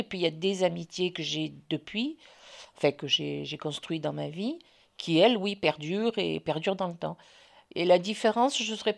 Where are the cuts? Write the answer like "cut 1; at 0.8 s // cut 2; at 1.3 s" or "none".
none

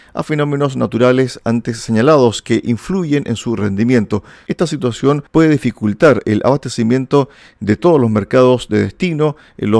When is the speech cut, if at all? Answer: cut 1; at 4.4 s

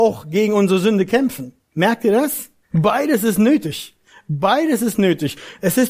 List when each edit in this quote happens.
cut 1; at 1.6 s

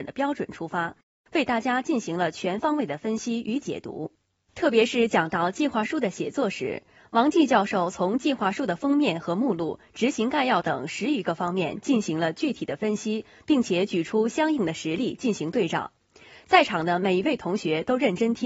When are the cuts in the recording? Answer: none

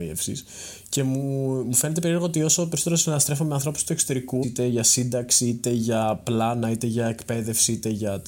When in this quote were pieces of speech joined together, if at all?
cut 1; at 4.4 s

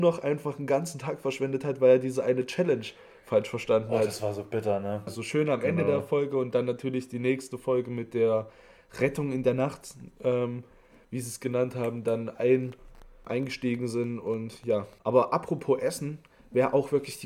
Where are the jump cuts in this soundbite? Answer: cut 1; at 5.1 s // cut 2; at 13.3 s // cut 3; at 15.0 s

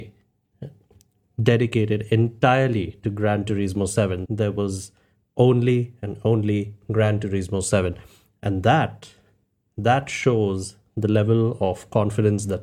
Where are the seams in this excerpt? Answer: cut 1; at 4.3 s

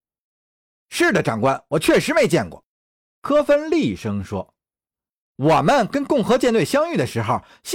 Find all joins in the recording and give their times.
none

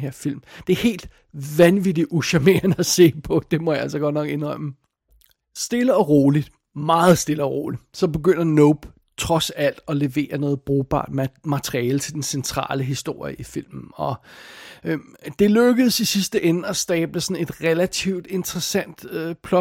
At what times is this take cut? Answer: none

